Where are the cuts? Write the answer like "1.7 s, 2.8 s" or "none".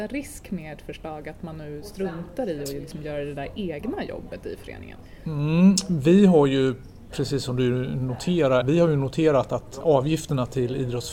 8.6 s, 9.8 s